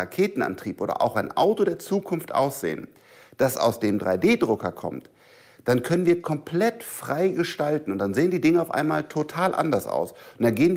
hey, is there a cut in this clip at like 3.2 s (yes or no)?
no